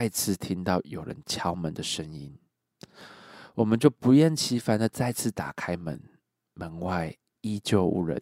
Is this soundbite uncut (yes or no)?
yes